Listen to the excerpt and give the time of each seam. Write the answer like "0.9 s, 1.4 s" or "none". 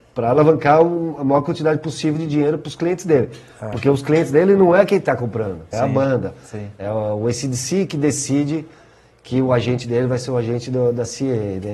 5.7 s